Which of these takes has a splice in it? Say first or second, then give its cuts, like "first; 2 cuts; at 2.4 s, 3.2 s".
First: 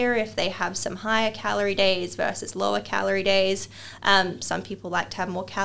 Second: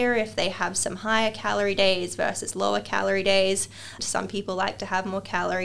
second; 1 cut; at 4.0 s